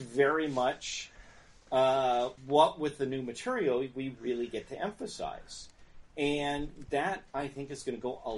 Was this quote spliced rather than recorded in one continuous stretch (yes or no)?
yes